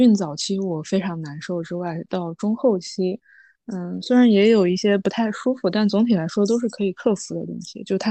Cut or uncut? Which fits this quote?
uncut